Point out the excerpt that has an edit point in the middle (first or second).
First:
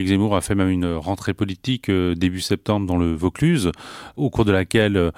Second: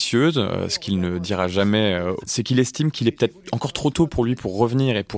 second